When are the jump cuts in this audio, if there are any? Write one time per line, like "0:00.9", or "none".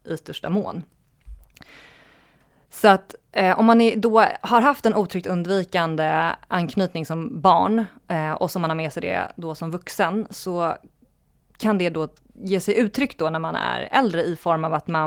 none